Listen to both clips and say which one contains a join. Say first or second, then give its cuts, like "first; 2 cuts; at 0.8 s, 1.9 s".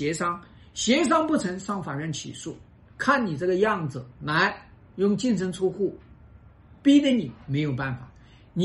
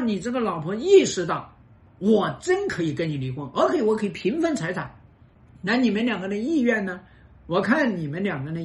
first; 2 cuts; at 2.9 s, 4.1 s